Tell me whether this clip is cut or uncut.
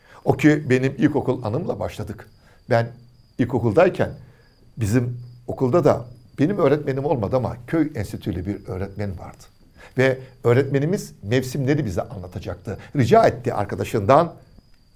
uncut